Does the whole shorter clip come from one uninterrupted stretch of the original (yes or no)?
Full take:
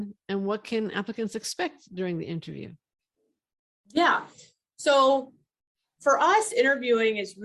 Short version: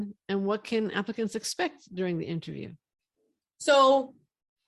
no